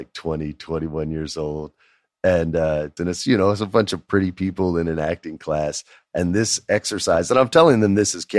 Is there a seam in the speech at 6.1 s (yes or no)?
no